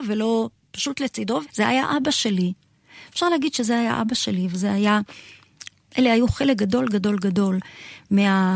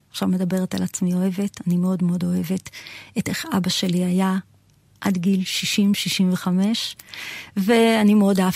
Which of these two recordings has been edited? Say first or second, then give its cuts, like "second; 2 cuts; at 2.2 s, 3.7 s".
first; 1 cut; at 1.4 s